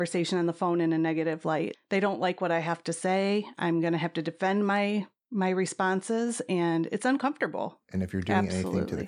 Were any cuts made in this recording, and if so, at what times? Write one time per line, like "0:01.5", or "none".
0:01.7
0:07.8